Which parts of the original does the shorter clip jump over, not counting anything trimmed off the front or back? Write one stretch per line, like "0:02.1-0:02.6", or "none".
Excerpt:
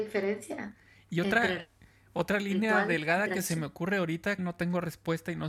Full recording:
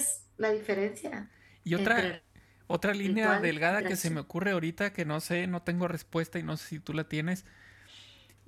0:04.9-0:05.5